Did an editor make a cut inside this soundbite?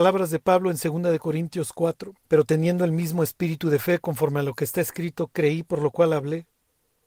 yes; 1 cut; at 2.2 s

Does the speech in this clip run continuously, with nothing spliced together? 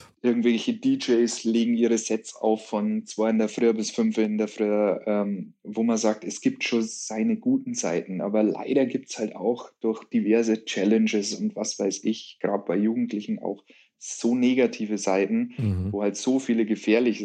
yes; 0 cuts

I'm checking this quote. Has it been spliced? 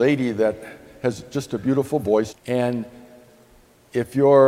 yes; 1 cut; at 2.3 s

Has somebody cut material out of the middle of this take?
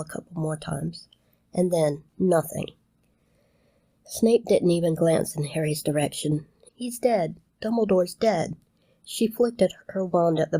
yes; 2 cuts; at 2.1 s, 6.7 s

